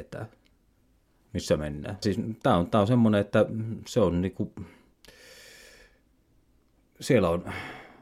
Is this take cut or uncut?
cut